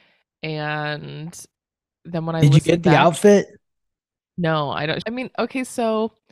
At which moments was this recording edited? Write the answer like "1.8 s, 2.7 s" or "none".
5.0 s